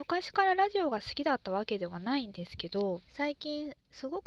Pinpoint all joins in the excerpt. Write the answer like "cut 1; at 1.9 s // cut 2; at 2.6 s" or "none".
cut 1; at 3.1 s